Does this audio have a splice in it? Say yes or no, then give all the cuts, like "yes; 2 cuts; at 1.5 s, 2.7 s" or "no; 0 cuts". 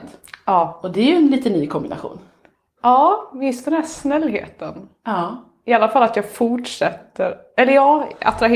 no; 0 cuts